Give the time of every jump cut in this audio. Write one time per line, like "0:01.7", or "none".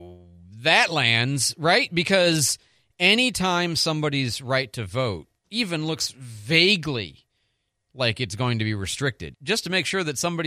0:09.3